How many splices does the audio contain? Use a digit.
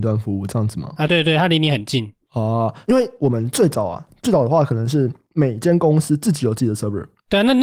1